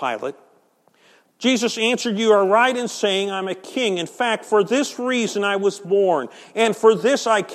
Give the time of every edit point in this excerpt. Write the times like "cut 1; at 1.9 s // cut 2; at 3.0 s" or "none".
none